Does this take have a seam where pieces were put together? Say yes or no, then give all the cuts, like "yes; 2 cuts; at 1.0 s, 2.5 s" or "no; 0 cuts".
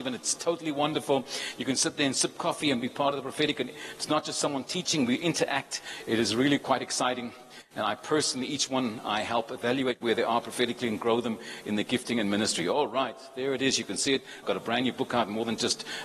yes; 1 cut; at 14.4 s